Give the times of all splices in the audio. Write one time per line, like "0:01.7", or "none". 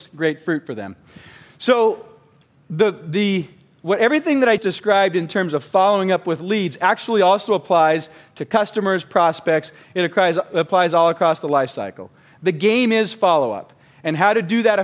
0:04.6